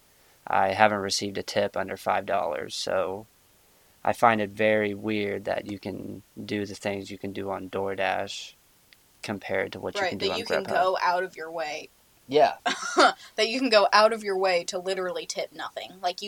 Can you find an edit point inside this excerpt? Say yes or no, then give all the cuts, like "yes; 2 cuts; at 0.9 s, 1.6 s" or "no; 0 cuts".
yes; 1 cut; at 12.6 s